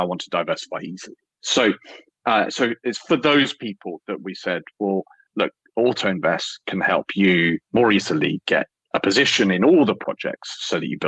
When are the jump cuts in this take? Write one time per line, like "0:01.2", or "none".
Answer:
0:01.4